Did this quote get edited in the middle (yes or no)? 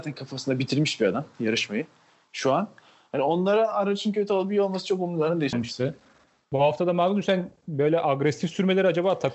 yes